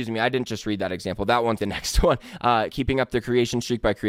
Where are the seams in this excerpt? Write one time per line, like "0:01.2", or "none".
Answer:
0:01.6
0:02.7